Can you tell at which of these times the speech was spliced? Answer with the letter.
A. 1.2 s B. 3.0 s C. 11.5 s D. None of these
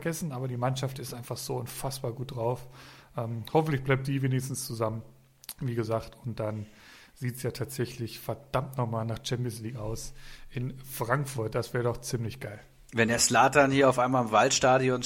D